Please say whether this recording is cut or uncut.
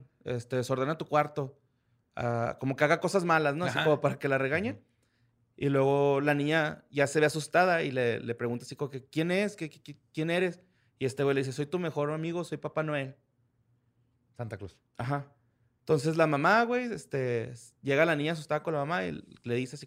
uncut